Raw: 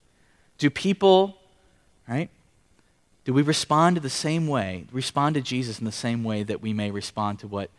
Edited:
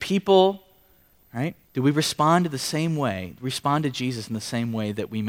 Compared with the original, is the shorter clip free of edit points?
no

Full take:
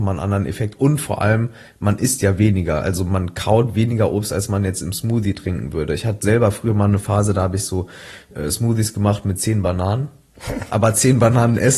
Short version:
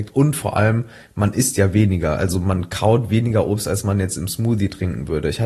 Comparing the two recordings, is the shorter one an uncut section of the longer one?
yes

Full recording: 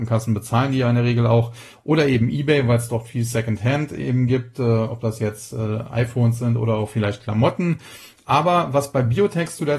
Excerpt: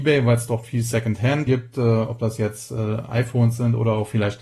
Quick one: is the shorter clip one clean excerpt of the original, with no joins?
no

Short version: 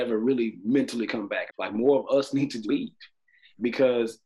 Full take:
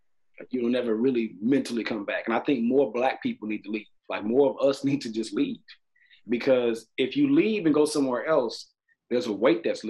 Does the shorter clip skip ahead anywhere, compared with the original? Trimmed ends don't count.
yes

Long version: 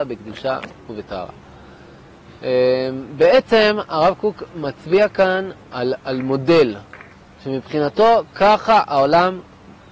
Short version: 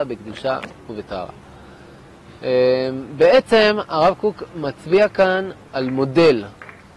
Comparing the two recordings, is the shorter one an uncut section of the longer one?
no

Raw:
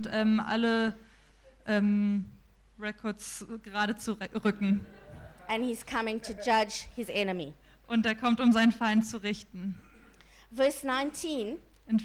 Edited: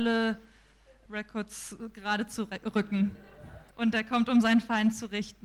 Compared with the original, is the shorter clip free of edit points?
no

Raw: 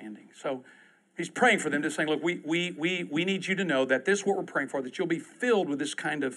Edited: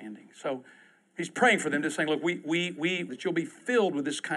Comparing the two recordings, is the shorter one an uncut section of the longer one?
no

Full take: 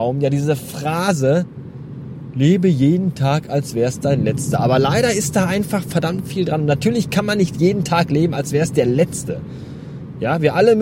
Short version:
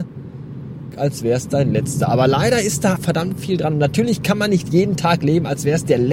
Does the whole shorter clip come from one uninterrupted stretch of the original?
no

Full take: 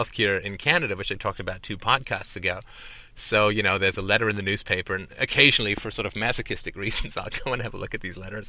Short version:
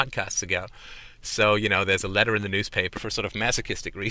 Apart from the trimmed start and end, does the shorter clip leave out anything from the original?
yes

